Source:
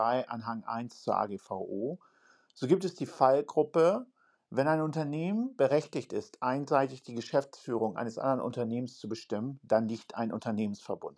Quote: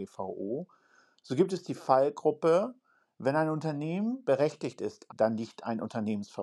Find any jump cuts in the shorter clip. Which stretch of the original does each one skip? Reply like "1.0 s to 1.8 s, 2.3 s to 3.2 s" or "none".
6.4 s to 9.6 s